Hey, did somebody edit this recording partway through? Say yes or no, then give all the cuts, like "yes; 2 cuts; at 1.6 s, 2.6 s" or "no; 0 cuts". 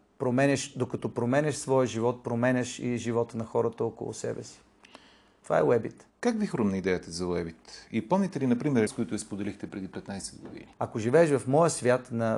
yes; 3 cuts; at 6.1 s, 8.9 s, 10.7 s